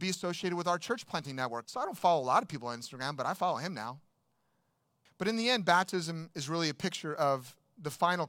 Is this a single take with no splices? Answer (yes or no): no